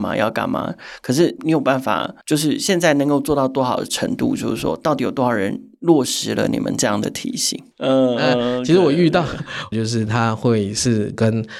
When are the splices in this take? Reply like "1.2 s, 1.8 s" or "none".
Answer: 2.2 s, 7.7 s, 9.7 s